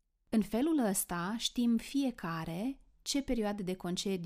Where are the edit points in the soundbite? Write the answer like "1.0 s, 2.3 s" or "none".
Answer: none